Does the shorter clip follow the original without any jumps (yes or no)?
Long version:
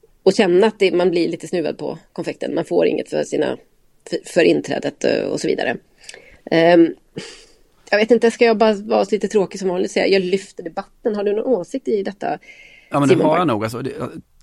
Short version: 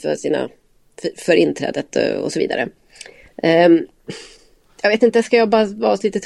yes